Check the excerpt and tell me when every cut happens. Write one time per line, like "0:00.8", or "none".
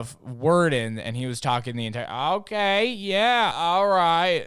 0:03.5